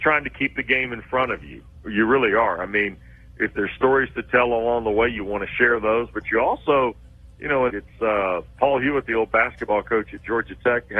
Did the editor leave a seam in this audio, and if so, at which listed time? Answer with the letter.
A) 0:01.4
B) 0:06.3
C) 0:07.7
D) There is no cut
C